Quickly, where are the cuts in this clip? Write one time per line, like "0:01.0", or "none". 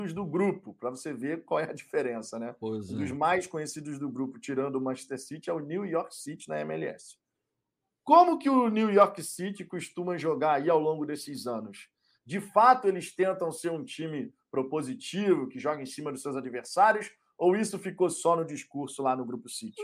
none